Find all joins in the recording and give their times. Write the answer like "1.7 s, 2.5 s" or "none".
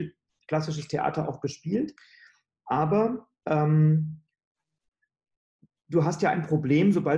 none